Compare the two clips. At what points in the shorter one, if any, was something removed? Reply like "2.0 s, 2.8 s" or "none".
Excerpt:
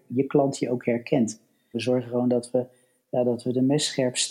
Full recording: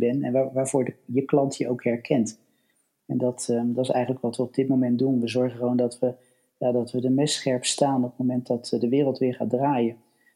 1.7 s